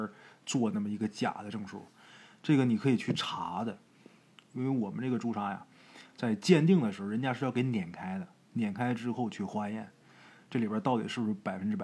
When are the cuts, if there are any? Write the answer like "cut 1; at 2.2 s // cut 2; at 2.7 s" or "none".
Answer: none